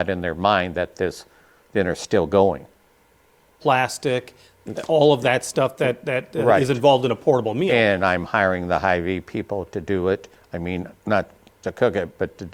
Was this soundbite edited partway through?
yes; 2 cuts; at 3.6 s, 11.0 s

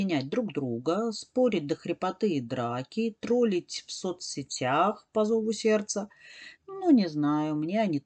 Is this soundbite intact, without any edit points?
no; 1 cut; at 6.6 s

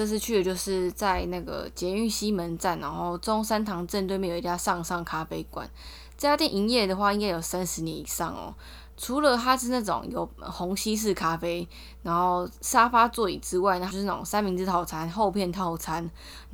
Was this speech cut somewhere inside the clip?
yes; 2 cuts; at 8.9 s, 13.9 s

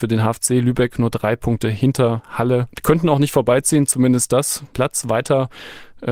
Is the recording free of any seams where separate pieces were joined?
no; 1 cut; at 4.7 s

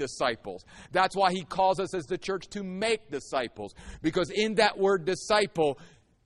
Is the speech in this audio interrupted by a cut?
no; 0 cuts

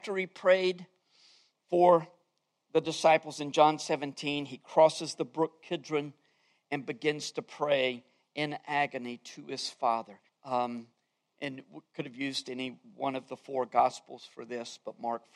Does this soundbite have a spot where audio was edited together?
yes; 1 cut; at 10.3 s

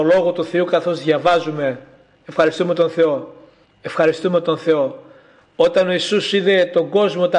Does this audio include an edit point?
yes; 1 cut; at 3.7 s

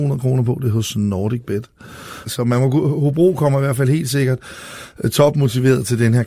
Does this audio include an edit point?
yes; 1 cut; at 2.2 s

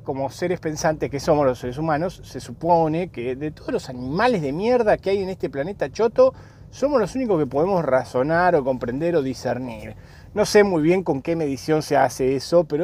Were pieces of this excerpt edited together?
no; 0 cuts

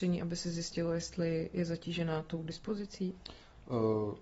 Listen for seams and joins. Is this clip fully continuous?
yes; 0 cuts

